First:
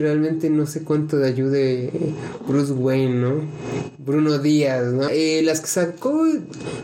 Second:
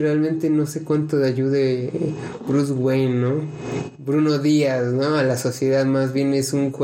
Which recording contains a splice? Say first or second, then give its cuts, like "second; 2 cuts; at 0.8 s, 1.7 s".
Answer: first; 1 cut; at 5.1 s